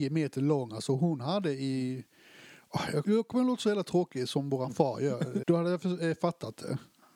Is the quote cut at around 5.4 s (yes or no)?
yes